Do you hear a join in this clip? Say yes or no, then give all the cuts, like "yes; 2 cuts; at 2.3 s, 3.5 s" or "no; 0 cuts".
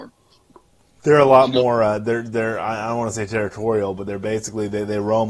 no; 0 cuts